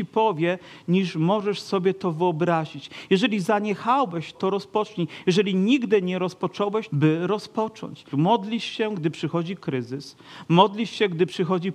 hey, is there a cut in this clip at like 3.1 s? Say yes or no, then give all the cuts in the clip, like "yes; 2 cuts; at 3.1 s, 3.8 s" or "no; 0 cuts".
no; 3 cuts; at 4.3 s, 6.9 s, 8.1 s